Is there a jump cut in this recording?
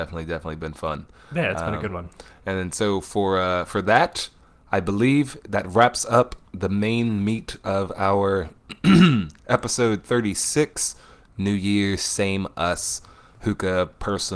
no; 0 cuts

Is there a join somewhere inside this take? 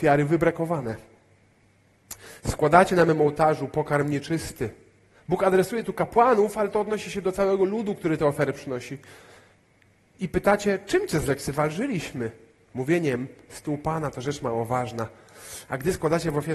no; 0 cuts

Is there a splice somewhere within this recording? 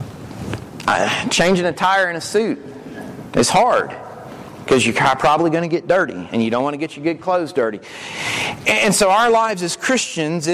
yes; 1 cut; at 3.3 s

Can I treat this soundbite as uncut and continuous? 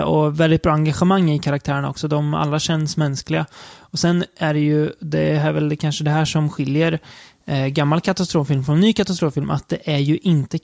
yes; 0 cuts

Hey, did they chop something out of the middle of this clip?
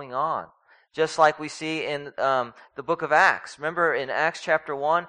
no; 0 cuts

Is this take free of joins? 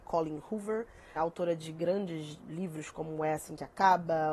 no; 1 cut; at 1.2 s

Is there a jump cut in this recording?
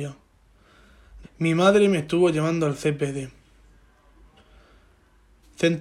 yes; 1 cut; at 1.2 s

